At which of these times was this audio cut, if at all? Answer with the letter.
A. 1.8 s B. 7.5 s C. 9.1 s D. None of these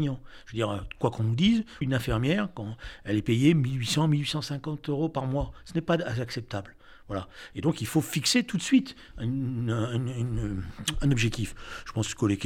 A